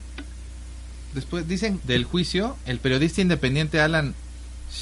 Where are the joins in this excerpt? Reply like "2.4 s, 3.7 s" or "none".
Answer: 1.8 s